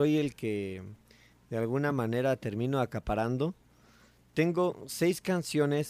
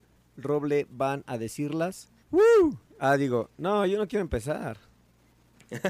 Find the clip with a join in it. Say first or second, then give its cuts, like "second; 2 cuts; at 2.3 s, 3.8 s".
second; 1 cut; at 2.2 s